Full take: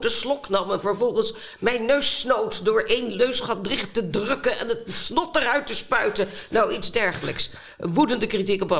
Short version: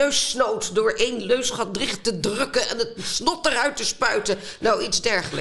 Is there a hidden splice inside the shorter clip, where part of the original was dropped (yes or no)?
no